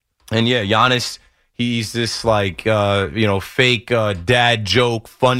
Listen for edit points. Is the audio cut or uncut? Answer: uncut